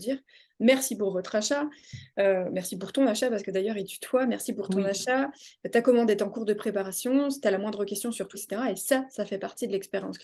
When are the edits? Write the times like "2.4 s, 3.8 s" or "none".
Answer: 8.3 s